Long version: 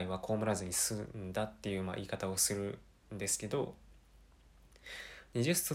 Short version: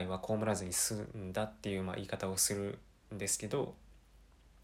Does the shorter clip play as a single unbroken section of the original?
yes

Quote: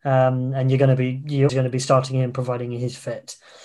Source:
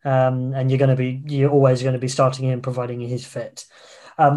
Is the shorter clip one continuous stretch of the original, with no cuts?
no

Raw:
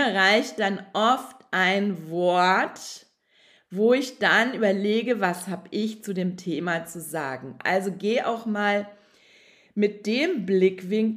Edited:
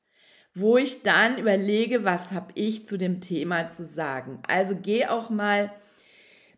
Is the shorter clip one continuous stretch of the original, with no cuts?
yes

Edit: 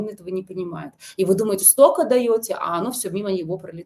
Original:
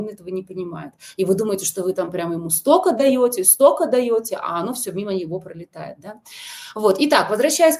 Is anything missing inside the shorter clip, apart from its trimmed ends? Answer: yes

